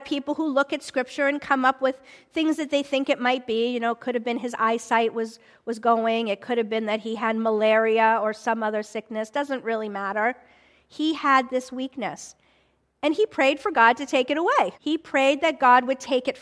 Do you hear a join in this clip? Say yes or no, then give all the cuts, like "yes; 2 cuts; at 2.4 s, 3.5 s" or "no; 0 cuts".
yes; 1 cut; at 14.7 s